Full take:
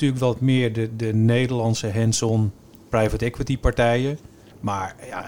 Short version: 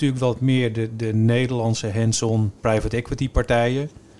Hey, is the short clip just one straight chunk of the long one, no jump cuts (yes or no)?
no